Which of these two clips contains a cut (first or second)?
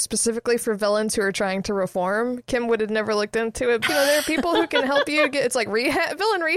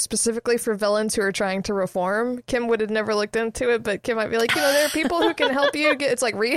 first